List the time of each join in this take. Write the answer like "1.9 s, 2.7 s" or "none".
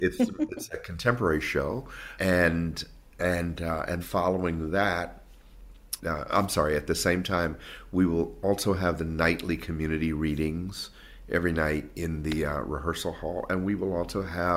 2.2 s, 4.0 s, 6.0 s